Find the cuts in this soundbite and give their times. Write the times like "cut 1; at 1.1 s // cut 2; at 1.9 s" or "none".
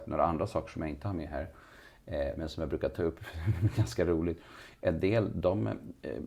none